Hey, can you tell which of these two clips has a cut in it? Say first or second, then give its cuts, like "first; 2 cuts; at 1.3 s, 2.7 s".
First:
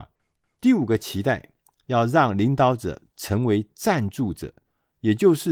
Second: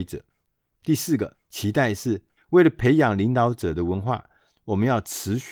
second; 1 cut; at 2.4 s